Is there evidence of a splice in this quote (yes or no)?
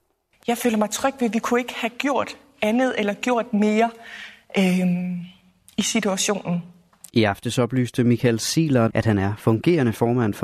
yes